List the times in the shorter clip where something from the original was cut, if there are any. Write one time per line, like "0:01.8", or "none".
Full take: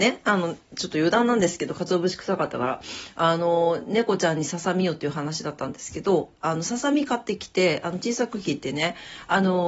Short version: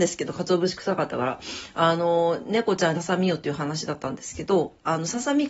0:02.9